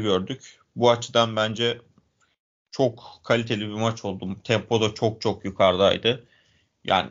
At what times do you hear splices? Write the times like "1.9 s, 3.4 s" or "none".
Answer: none